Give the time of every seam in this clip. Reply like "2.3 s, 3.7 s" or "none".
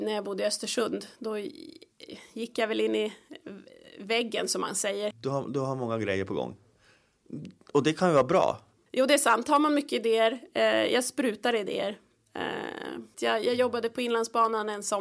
5.1 s, 8.9 s, 13.1 s